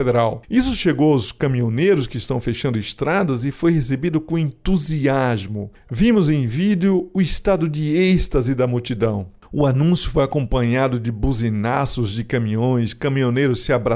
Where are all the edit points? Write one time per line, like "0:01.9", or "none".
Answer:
none